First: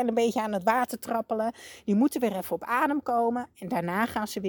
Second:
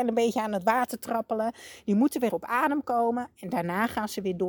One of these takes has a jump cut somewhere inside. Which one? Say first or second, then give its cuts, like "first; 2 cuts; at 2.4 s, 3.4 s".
second; 1 cut; at 2.3 s